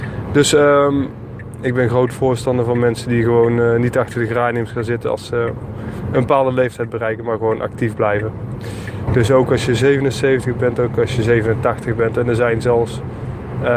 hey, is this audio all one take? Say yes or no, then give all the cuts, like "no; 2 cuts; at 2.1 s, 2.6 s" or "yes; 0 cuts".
no; 1 cut; at 9.1 s